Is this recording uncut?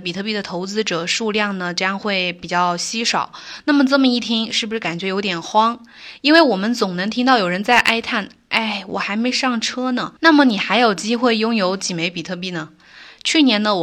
no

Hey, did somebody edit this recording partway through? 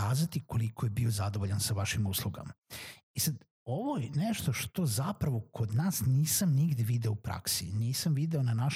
no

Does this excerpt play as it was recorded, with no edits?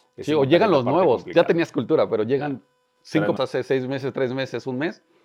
no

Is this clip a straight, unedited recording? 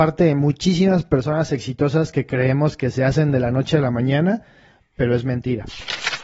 yes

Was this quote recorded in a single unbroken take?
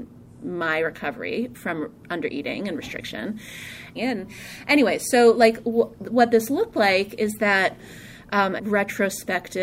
no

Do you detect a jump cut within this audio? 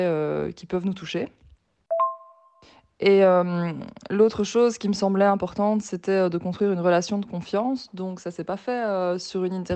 no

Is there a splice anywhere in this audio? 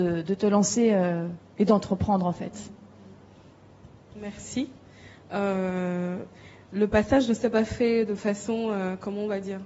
no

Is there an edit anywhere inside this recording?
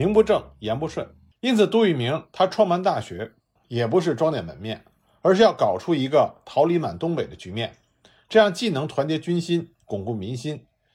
yes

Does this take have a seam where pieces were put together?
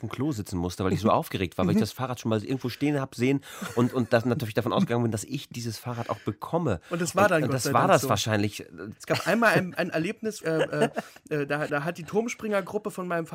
yes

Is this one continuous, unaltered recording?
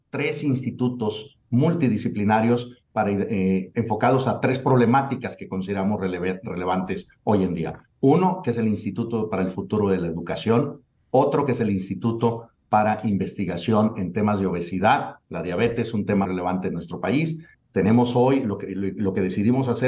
no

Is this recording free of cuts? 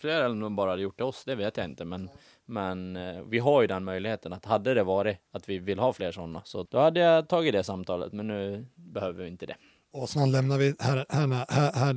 no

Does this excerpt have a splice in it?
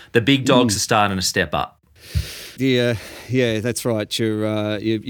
yes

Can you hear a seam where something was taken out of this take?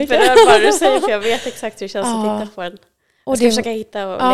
no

